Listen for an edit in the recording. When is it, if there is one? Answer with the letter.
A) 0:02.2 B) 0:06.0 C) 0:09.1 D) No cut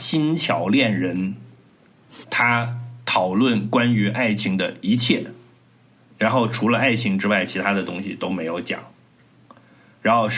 A